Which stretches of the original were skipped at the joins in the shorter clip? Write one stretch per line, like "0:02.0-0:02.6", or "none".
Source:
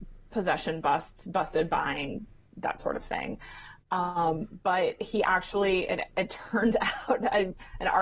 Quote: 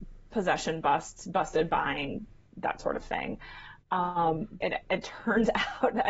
0:04.6-0:05.9